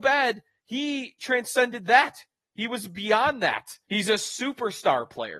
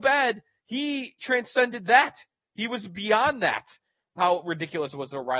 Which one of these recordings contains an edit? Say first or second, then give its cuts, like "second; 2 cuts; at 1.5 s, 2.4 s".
first; 1 cut; at 3.8 s